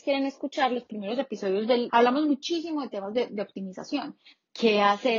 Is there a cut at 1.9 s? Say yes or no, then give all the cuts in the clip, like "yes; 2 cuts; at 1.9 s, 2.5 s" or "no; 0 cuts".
yes; 1 cut; at 1.9 s